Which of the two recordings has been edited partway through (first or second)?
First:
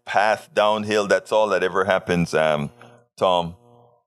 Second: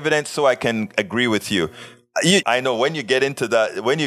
second